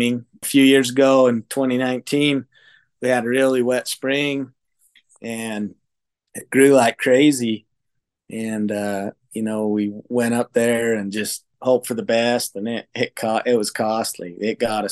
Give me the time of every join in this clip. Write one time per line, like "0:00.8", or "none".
none